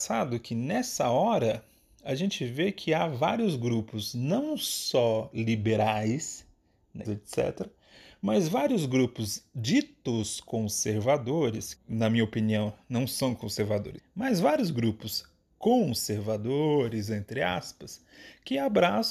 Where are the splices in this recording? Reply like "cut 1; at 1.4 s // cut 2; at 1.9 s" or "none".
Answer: cut 1; at 7.0 s // cut 2; at 11.7 s // cut 3; at 14.0 s